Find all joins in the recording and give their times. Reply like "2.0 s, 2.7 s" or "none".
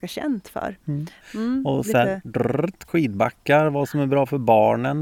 1.2 s, 2.9 s